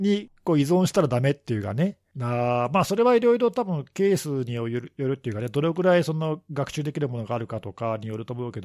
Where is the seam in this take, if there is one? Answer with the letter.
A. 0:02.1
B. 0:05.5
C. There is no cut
A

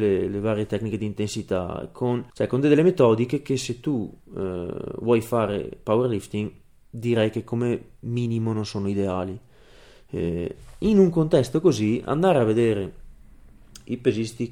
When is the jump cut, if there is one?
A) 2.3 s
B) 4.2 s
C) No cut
A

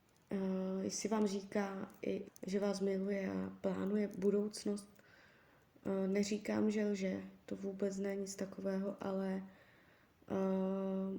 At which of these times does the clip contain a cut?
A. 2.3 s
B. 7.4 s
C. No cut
A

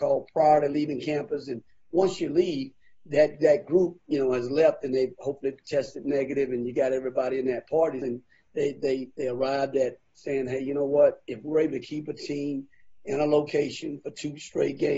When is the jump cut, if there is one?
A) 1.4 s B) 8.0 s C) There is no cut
B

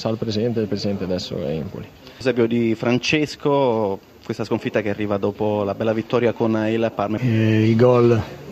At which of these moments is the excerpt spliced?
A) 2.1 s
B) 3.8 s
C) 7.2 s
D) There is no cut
C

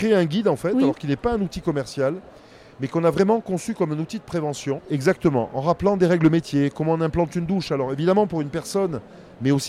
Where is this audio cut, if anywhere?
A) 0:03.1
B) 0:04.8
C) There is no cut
B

